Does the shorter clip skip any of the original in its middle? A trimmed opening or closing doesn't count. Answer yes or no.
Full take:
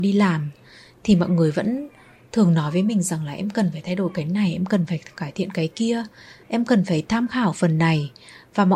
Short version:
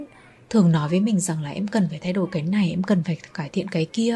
no